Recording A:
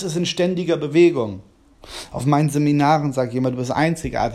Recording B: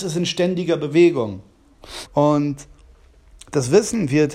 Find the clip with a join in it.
B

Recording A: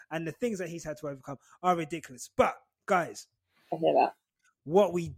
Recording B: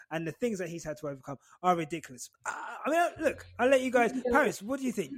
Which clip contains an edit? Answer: B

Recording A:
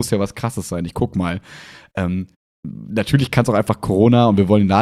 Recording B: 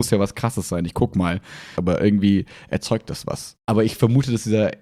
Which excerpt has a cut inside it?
B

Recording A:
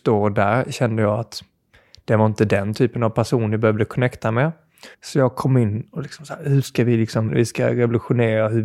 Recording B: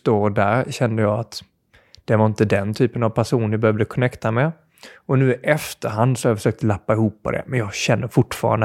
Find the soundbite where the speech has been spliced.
A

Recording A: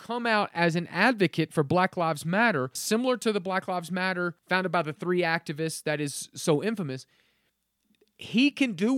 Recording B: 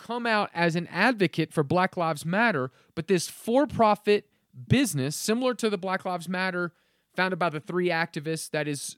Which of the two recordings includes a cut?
A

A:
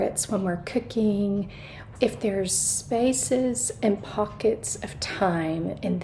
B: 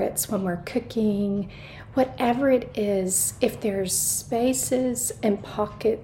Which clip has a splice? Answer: A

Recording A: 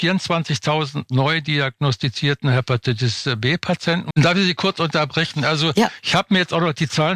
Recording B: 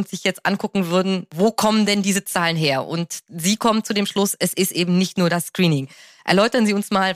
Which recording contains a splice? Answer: A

